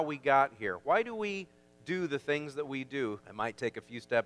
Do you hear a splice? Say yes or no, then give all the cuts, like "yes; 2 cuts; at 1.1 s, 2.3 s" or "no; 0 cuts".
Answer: yes; 1 cut; at 3.2 s